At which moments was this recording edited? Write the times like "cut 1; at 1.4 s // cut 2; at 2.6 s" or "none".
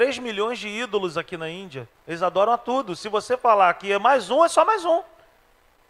cut 1; at 2.0 s